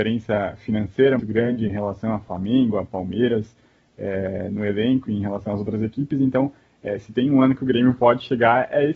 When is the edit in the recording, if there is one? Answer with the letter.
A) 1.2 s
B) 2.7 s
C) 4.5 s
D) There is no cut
A